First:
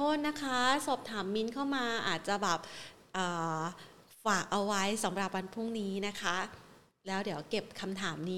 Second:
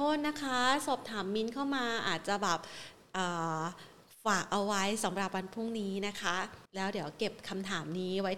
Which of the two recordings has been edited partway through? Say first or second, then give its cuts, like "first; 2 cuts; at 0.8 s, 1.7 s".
second; 1 cut; at 6.7 s